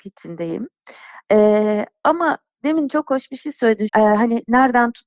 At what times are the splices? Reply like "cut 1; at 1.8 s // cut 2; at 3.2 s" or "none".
cut 1; at 3.9 s